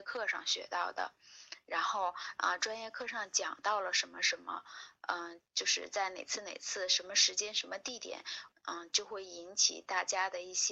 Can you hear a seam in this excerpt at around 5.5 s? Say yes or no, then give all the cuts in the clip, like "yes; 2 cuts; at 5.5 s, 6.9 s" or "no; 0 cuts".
yes; 2 cuts; at 5.5 s, 8.5 s